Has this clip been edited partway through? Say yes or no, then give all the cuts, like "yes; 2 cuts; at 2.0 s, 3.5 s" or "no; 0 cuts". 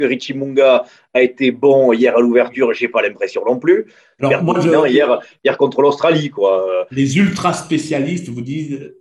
yes; 1 cut; at 4.2 s